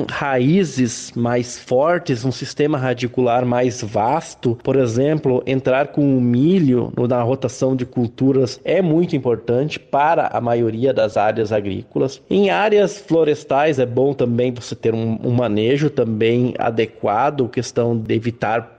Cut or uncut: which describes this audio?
uncut